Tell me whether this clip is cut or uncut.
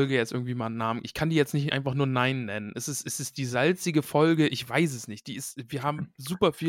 uncut